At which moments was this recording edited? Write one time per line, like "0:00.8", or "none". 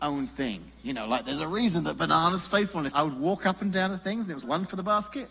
0:02.9
0:04.4